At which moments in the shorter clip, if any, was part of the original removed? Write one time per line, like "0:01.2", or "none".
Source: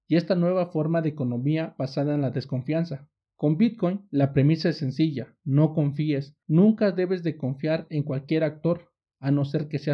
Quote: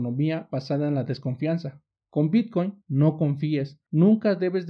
0:02.8